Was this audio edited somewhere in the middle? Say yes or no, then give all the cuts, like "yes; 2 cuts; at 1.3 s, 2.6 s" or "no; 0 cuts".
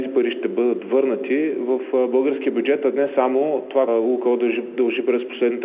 yes; 1 cut; at 3.9 s